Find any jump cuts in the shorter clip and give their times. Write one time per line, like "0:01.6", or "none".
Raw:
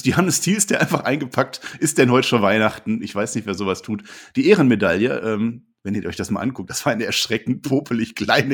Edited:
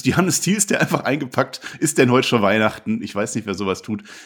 none

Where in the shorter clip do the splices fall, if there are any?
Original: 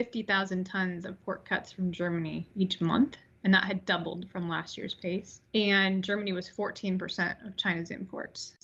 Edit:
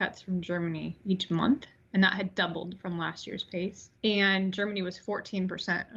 none

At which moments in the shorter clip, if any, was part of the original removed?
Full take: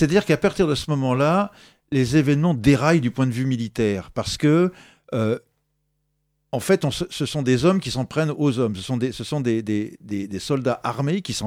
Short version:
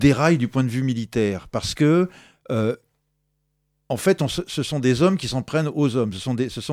none

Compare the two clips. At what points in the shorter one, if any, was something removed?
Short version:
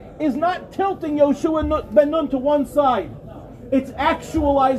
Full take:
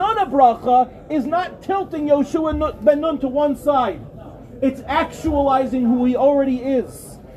none

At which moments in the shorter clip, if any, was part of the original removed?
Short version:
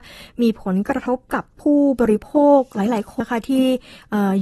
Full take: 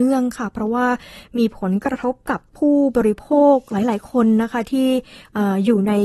0:03.2

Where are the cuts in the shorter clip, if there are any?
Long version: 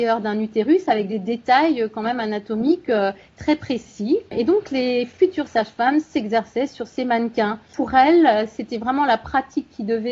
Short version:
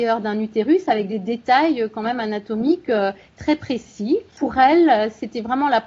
0:04.3

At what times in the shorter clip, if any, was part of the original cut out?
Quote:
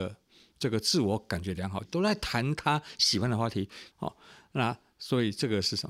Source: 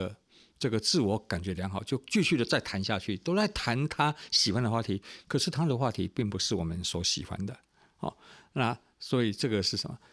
0:01.8
0:03.9

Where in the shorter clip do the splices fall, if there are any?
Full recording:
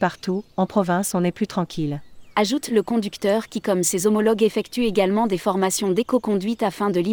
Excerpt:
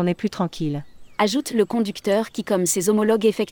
none

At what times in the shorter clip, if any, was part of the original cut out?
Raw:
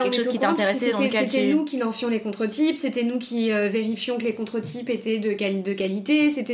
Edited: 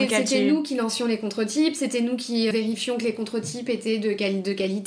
0:02.5

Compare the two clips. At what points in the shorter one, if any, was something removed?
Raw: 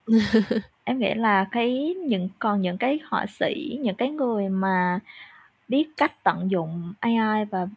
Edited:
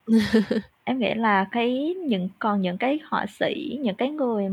none

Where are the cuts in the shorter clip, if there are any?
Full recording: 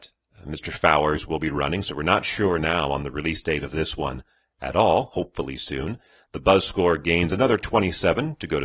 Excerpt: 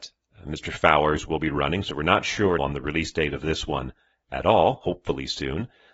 0:02.6

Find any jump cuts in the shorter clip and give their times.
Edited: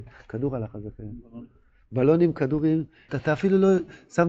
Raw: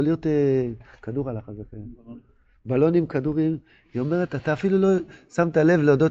0:03.1

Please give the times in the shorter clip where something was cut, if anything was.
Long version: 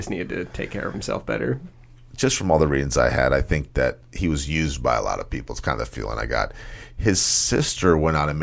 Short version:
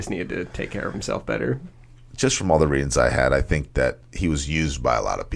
none

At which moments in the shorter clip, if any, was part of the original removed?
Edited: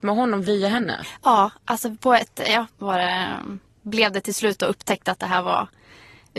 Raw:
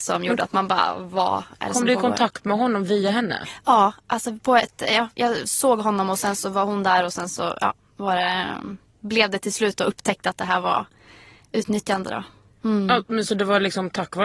0:02.7

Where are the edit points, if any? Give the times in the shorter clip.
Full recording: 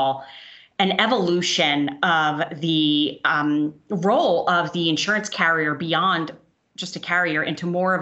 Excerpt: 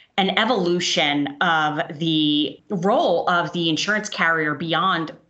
0:02.6

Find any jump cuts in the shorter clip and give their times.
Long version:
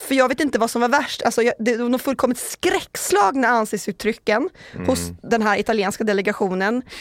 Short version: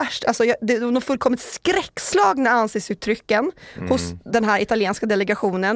none

